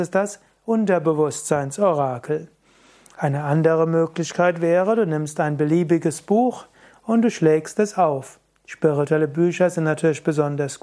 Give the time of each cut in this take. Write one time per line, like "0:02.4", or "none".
none